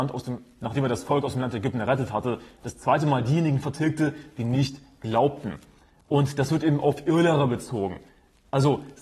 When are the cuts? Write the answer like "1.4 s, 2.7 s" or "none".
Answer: none